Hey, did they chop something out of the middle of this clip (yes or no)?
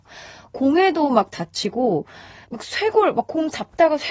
yes